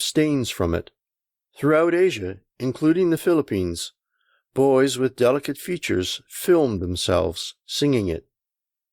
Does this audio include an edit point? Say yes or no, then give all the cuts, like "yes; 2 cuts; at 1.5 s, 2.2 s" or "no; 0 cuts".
yes; 1 cut; at 1.4 s